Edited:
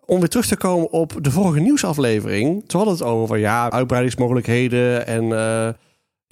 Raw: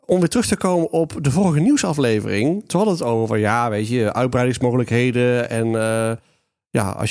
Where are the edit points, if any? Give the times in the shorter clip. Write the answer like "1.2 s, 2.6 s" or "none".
3.7 s